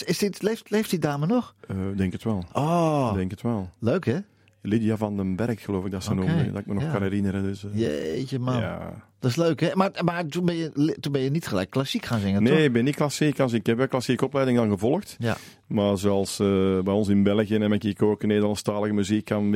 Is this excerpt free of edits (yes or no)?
yes